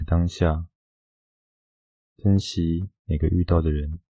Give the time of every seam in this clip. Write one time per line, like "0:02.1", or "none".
none